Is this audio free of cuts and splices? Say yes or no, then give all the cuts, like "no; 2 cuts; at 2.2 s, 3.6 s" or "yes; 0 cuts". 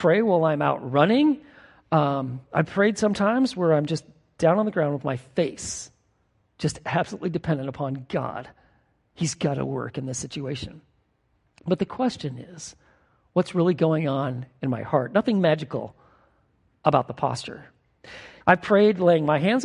no; 2 cuts; at 11.4 s, 18.4 s